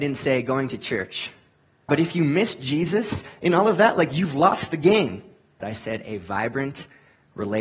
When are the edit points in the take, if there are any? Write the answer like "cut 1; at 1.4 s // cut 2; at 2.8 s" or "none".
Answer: cut 1; at 1.9 s // cut 2; at 5.6 s